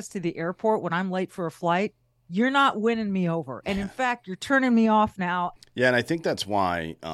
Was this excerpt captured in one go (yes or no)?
no